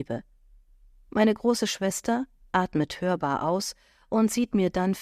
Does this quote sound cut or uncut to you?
cut